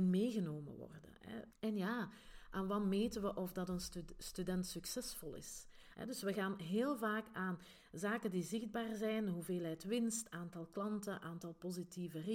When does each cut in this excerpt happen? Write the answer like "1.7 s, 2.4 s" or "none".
1.5 s, 5.9 s